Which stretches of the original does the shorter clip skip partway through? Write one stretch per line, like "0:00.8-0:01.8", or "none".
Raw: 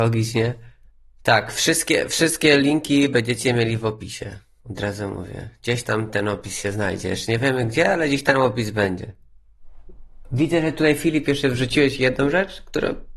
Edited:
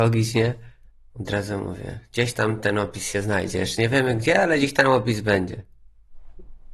0:01.1-0:04.6